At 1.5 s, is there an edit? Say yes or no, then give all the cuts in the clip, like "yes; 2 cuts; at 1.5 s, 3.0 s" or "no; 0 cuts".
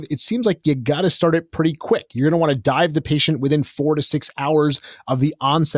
no; 0 cuts